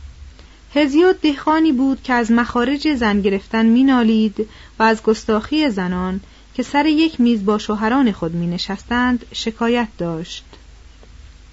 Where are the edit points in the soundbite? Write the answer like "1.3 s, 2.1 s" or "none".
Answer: none